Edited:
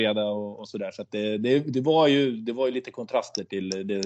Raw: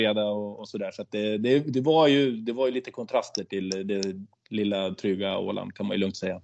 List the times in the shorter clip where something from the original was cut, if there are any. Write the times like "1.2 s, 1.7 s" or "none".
none